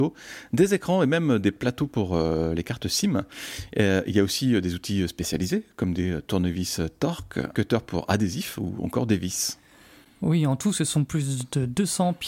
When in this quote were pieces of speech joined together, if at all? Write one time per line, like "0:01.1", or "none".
0:07.5